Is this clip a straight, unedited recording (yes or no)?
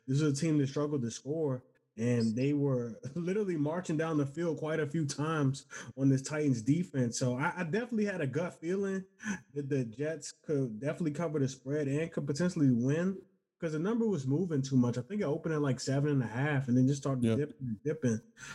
yes